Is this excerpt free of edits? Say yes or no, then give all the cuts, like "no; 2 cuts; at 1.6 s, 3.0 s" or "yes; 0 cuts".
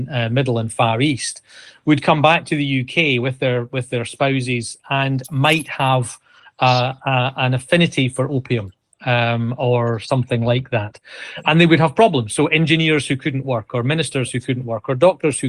yes; 0 cuts